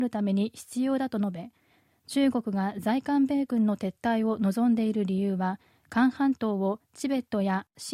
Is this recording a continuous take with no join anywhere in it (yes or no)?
yes